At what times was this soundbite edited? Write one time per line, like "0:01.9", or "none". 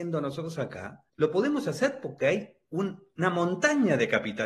0:01.1